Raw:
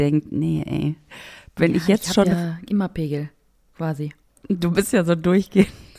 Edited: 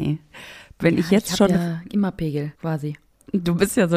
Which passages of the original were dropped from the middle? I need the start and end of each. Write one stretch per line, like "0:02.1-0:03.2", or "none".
0:03.3-0:03.7